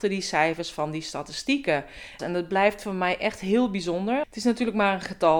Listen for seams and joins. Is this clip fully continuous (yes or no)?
no